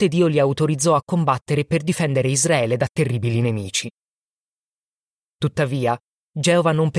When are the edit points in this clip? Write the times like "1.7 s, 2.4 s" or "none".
none

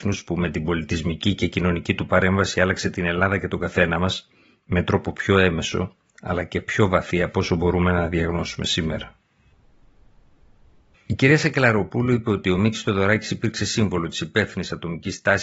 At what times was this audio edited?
none

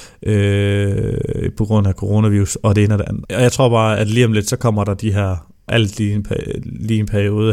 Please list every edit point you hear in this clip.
3.2 s, 5.7 s

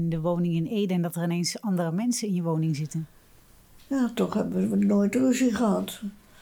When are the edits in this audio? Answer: none

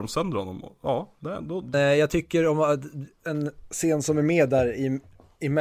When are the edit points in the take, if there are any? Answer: 1.7 s

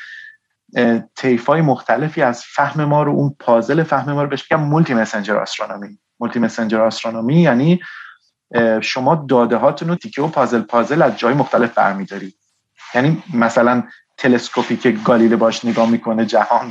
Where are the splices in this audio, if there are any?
10.0 s

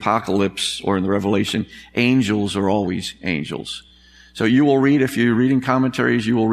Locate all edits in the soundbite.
none

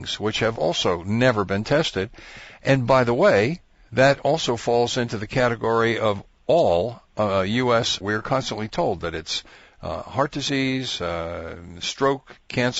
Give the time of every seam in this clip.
8.0 s

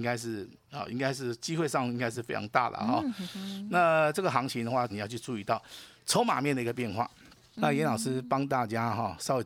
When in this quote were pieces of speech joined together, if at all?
4.9 s, 7.5 s

